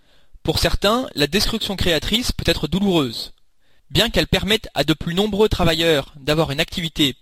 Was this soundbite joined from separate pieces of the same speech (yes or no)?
yes